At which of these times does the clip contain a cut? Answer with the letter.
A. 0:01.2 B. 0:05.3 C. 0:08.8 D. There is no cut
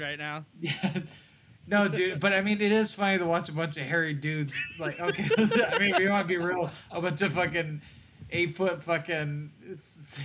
D